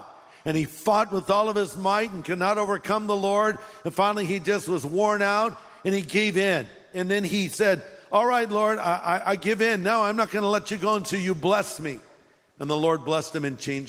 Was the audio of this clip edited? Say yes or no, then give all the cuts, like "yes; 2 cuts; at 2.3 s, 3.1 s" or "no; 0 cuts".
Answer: no; 0 cuts